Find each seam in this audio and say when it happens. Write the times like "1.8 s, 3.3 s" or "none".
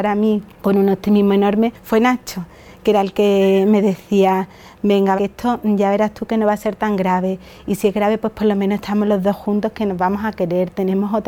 5.2 s